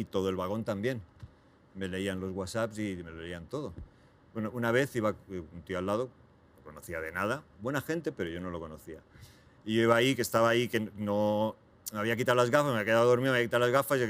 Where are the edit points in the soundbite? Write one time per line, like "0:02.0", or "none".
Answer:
none